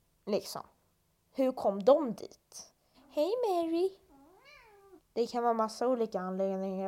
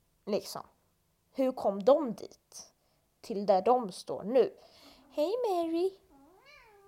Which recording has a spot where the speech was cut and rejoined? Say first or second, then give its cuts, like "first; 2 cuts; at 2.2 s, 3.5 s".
first; 2 cuts; at 2.9 s, 5.0 s